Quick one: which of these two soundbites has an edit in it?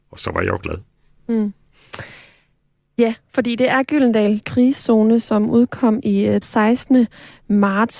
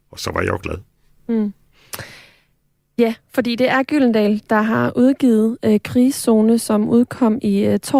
first; 2 cuts; at 4.4 s, 6.4 s

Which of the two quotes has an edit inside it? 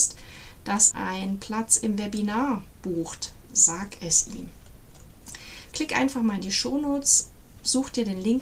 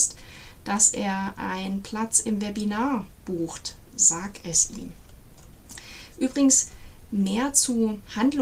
first; 2 cuts; at 0.9 s, 5.7 s

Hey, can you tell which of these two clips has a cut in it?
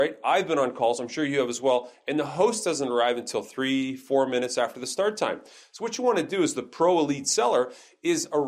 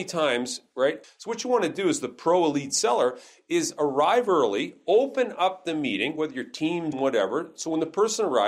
second; 2 cuts; at 1.0 s, 6.9 s

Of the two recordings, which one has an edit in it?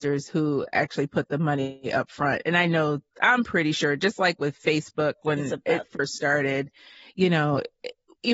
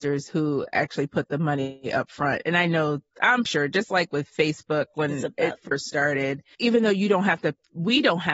second; 2 cuts; at 3.5 s, 6.5 s

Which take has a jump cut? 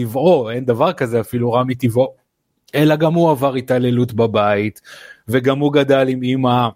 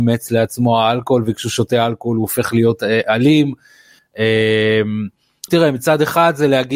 second; 2 cuts; at 4.0 s, 5.5 s

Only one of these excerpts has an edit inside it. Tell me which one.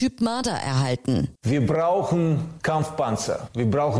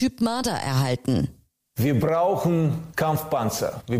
first; 1 cut; at 1.4 s

